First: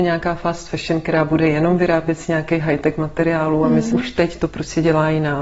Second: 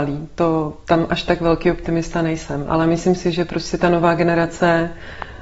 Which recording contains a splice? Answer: first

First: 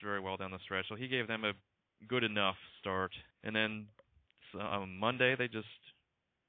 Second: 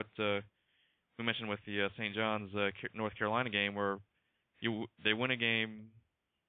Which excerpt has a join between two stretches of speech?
first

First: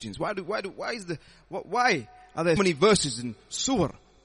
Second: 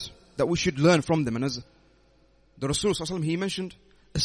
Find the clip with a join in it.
first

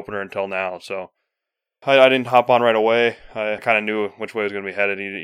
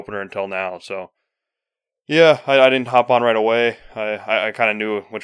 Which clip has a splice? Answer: first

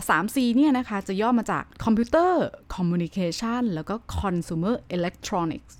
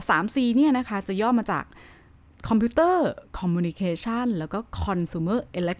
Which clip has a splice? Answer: first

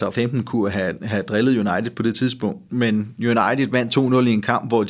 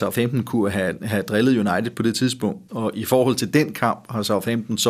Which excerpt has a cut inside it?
second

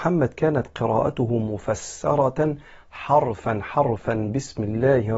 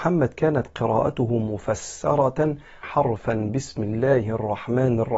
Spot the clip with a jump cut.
second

